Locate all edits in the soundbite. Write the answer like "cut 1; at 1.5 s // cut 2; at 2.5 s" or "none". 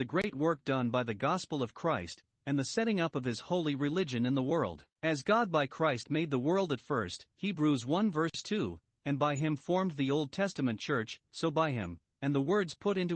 cut 1; at 4.9 s // cut 2; at 11.2 s